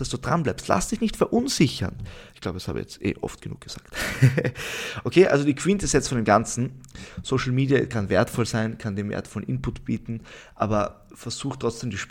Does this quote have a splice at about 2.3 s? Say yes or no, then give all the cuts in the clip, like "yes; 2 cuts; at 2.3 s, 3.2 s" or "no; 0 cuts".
yes; 1 cut; at 2.3 s